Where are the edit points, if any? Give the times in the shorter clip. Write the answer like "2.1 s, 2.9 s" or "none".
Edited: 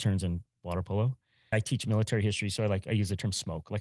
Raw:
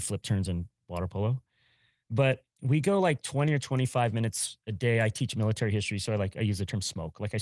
1.5 s